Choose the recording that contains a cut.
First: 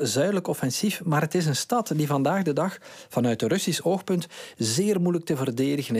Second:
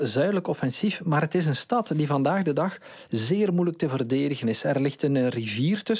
second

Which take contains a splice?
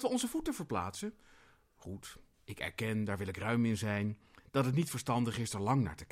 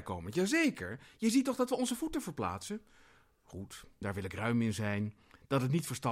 second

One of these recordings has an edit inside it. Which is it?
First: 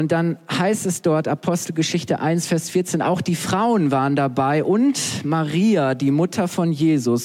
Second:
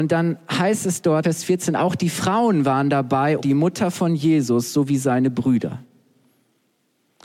second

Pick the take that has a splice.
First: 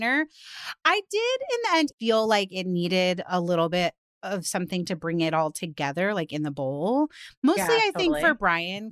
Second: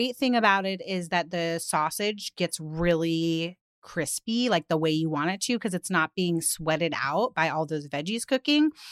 first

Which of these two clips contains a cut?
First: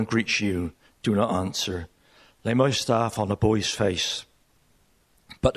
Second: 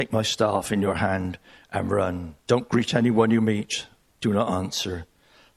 second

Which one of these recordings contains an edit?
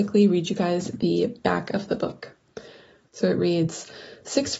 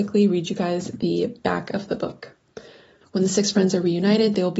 second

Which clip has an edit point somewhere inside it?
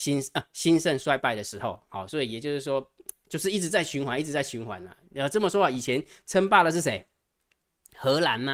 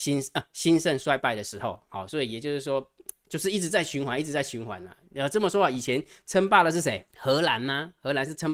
second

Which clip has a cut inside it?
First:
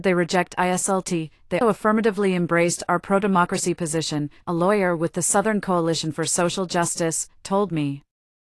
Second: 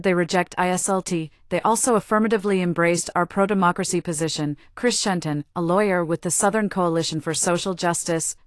first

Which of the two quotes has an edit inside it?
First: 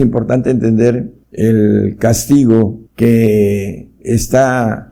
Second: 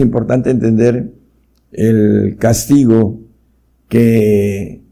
first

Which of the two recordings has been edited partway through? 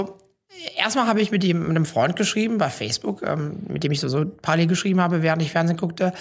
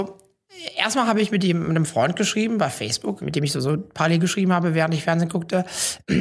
second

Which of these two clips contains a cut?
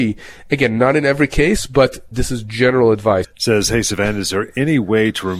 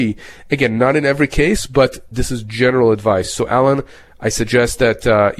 first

